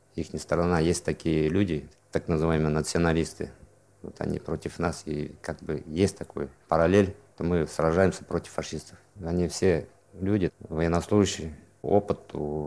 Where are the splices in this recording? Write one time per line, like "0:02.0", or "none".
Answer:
0:09.1
0:10.5